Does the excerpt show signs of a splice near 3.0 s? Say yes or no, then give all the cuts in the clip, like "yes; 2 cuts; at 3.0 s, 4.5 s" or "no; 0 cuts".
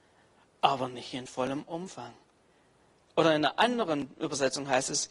yes; 1 cut; at 3.0 s